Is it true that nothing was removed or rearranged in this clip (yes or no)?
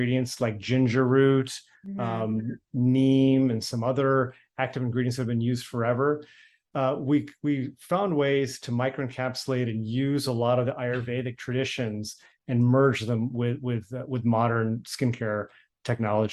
yes